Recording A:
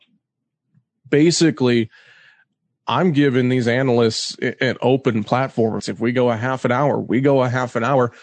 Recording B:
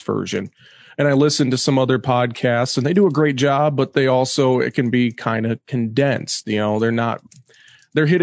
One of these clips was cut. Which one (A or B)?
A